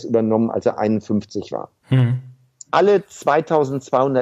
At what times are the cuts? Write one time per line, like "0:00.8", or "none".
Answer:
0:02.7